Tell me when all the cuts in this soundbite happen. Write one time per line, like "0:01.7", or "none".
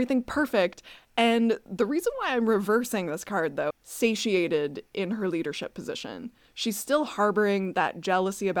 0:03.7